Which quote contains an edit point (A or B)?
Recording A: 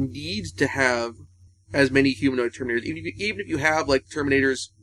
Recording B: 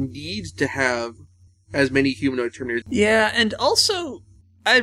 B